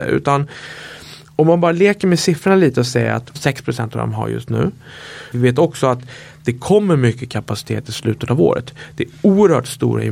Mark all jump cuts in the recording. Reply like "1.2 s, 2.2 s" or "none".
3.4 s, 5.3 s